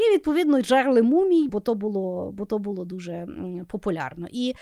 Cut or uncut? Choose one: cut